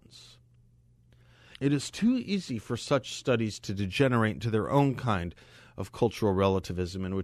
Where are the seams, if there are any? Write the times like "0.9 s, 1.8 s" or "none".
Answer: 1.5 s